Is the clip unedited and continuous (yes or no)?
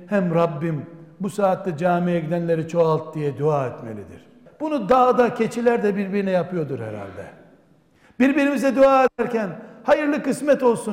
no